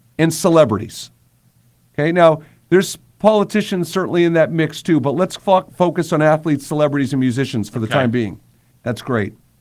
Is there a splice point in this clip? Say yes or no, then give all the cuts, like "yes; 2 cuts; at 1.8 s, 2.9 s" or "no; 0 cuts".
yes; 1 cut; at 8.7 s